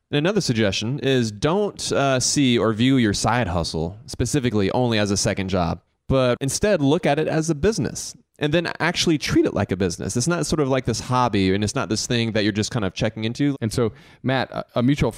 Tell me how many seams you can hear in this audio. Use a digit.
1